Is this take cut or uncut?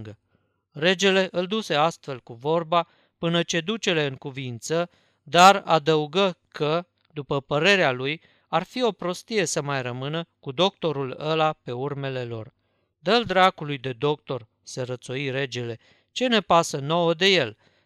uncut